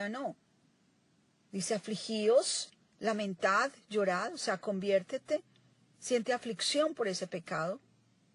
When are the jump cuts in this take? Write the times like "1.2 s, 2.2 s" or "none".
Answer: none